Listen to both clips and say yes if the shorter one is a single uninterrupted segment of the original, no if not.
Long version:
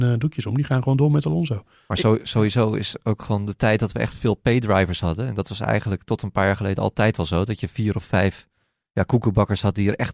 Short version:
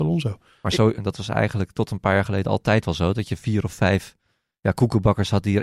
no